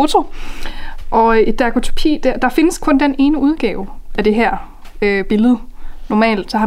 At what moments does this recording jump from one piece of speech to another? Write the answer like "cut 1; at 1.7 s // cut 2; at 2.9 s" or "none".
none